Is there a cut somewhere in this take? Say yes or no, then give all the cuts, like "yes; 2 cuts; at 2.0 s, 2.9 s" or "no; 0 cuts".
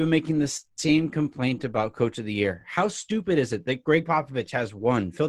no; 0 cuts